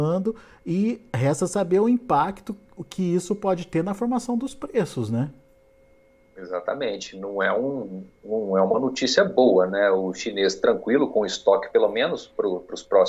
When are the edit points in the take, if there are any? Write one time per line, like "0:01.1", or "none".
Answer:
none